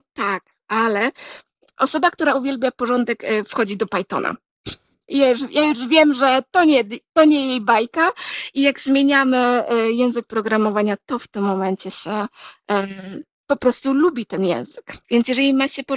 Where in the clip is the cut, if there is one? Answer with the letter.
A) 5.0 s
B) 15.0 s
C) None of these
B